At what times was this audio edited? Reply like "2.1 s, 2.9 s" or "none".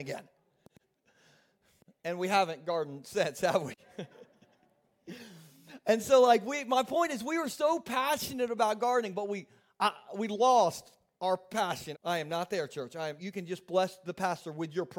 11.9 s, 13.2 s